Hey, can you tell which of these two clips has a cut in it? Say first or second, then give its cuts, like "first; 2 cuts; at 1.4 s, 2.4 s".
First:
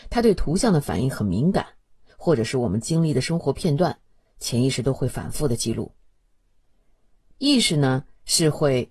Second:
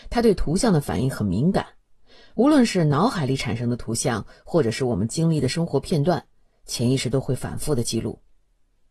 first; 2 cuts; at 2.1 s, 7.3 s